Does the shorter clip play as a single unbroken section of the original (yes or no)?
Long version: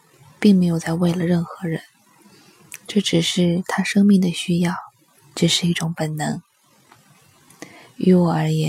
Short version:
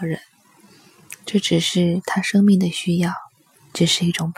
yes